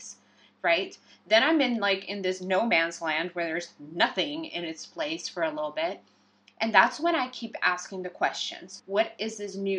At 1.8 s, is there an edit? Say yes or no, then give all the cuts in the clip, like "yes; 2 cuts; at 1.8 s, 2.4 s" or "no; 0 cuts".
no; 1 cut; at 8.8 s